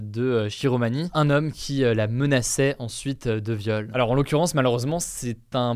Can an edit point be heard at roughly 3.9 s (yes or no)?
no